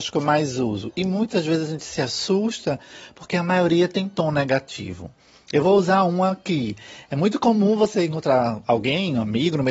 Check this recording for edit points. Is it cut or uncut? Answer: uncut